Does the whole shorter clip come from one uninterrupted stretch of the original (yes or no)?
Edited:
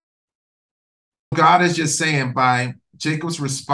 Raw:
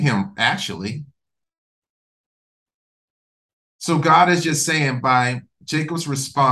no